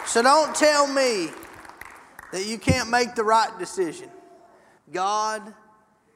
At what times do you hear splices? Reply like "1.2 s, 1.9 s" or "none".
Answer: 4.8 s